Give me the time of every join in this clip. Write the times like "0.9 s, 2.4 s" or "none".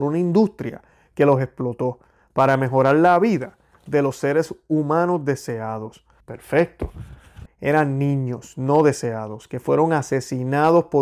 6.2 s, 7.5 s